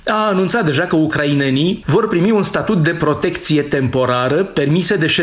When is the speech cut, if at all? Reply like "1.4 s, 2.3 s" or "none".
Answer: 1.8 s